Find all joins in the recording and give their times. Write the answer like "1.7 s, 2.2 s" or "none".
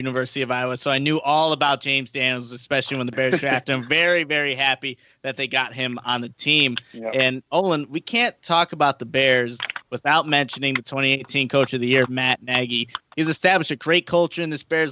none